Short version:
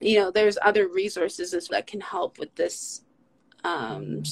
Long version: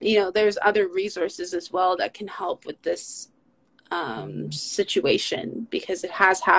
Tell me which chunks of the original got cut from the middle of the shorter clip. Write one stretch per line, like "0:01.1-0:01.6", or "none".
0:01.7-0:02.0